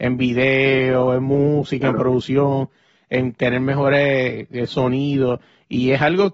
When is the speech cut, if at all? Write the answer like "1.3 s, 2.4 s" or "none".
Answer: none